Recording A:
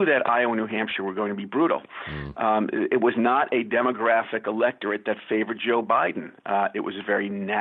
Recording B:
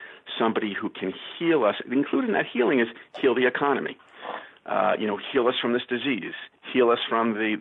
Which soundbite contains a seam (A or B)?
B